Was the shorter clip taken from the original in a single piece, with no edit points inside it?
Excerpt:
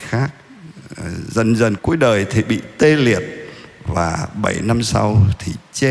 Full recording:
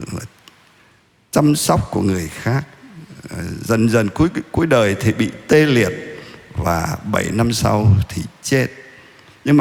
no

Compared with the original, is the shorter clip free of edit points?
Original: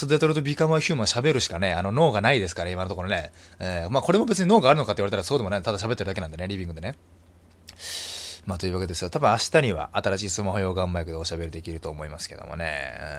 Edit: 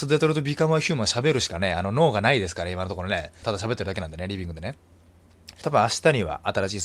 no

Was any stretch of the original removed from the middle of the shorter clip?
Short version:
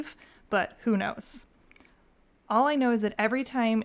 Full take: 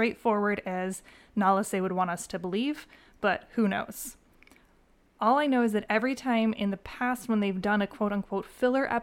no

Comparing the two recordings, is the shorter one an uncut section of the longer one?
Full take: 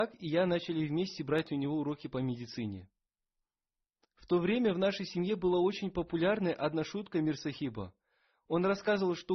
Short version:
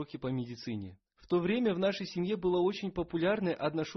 no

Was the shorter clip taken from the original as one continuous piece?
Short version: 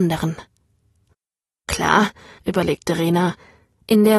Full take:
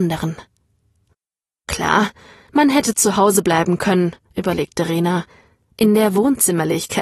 no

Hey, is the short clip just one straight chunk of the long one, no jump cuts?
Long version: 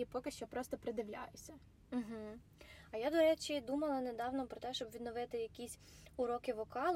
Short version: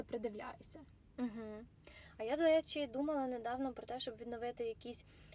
yes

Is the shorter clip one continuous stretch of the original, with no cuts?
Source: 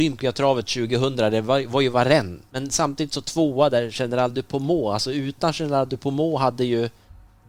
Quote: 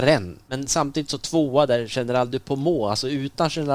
yes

